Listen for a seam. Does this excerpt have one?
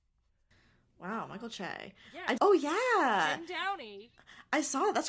yes; 1 cut; at 2.4 s

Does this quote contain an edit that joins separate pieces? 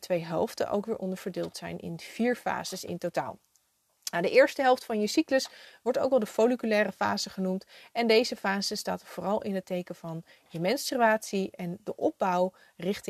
no; 0 cuts

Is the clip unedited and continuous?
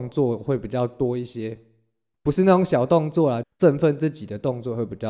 no; 1 cut; at 3.4 s

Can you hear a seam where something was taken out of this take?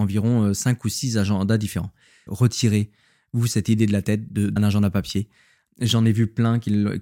yes; 2 cuts; at 2.3 s, 4.6 s

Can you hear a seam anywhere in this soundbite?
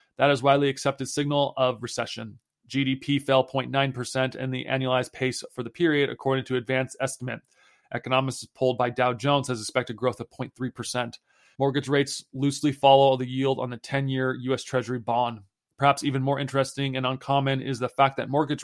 yes; 2 cuts; at 11.6 s, 15.7 s

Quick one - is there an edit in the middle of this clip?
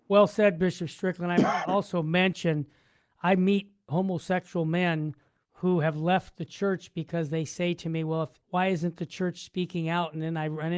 yes; 1 cut; at 8.4 s

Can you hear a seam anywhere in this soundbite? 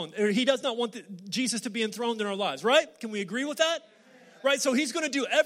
no; 0 cuts

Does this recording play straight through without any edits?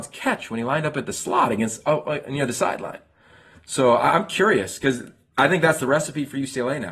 yes; 0 cuts

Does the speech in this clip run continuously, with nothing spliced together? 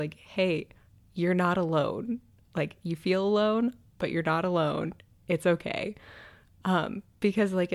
yes; 0 cuts

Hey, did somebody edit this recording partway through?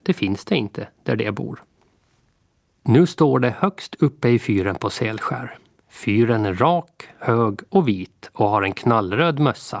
no; 0 cuts

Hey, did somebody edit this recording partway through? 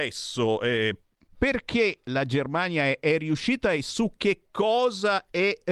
no; 0 cuts

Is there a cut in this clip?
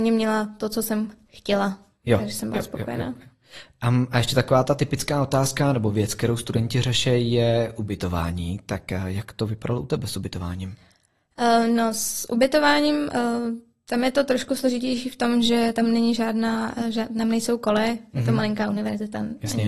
no; 0 cuts

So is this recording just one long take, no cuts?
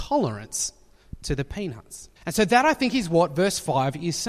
no; 1 cut; at 2.2 s

